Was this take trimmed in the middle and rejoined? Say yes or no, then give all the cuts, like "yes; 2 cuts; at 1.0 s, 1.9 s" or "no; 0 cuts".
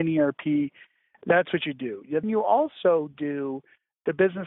yes; 1 cut; at 2.2 s